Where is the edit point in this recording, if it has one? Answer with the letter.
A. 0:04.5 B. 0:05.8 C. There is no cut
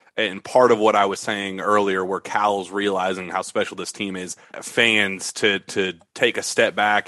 A